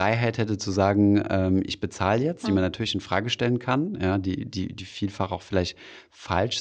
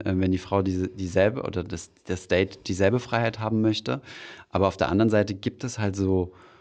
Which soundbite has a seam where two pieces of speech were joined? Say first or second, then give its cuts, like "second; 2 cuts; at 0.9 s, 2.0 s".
first; 1 cut; at 2.4 s